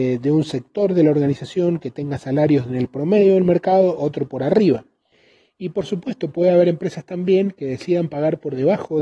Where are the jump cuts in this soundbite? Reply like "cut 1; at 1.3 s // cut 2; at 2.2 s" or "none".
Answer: none